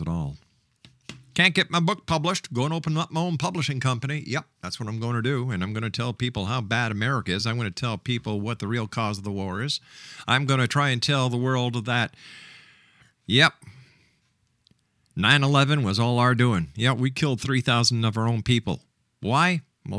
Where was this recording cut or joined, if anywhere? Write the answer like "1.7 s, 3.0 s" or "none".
none